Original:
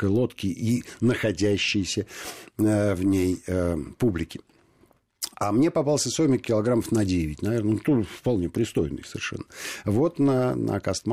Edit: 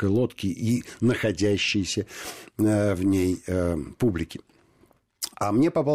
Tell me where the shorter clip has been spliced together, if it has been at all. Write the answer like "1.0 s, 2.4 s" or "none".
none